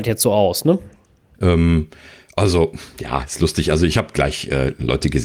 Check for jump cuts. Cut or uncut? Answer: cut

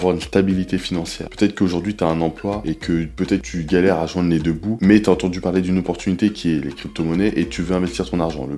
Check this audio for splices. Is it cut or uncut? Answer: uncut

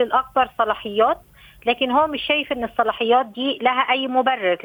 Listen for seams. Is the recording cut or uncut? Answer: uncut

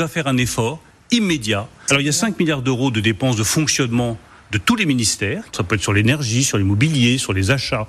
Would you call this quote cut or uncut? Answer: uncut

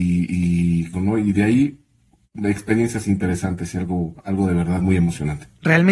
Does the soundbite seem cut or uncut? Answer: cut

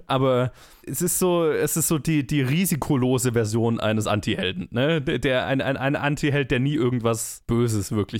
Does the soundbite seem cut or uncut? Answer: uncut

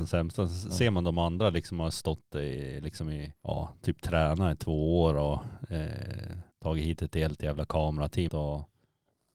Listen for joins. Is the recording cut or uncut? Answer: cut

